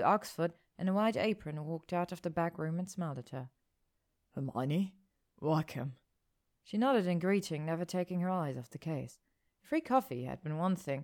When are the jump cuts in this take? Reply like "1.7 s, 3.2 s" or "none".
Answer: none